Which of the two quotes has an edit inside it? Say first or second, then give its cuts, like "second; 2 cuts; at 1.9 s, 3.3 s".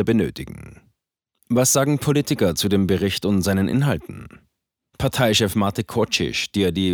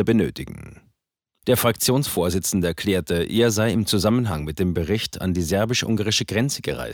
second; 1 cut; at 1.4 s